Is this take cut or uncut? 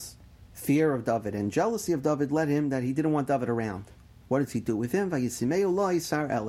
cut